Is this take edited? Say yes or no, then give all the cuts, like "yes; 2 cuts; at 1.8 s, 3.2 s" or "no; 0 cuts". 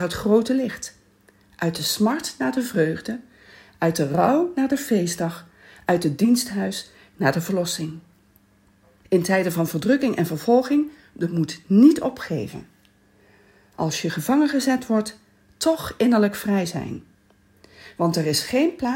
yes; 1 cut; at 9.0 s